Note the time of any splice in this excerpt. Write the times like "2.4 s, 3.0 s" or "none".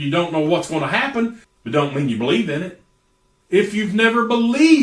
1.4 s, 3.4 s

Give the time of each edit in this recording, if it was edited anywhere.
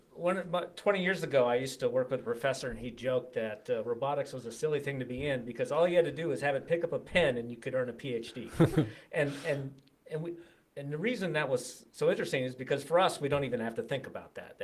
none

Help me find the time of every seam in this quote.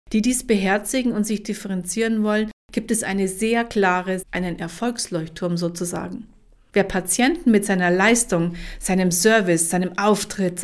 4.2 s, 6.7 s

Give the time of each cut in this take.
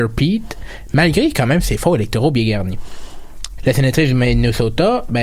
3.6 s

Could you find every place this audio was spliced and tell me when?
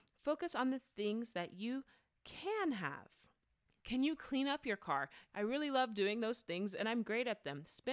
3.8 s, 5.3 s

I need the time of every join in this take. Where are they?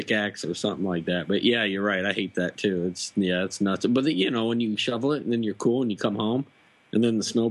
none

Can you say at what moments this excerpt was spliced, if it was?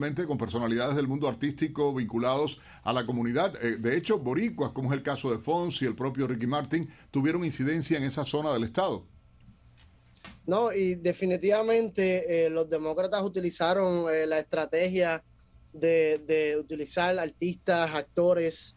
none

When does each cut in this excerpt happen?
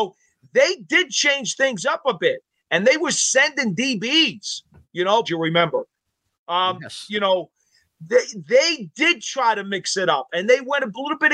5.2 s

